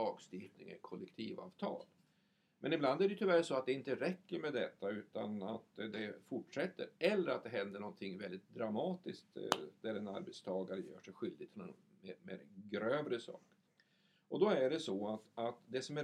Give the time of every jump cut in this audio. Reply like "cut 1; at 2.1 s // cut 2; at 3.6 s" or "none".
none